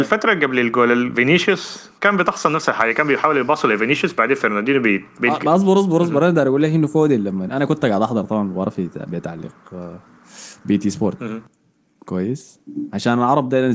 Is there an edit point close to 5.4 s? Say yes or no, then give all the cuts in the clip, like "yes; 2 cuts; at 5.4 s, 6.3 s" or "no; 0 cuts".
no; 0 cuts